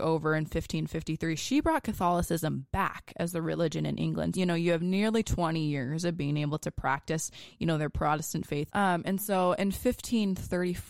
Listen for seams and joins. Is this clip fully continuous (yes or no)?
no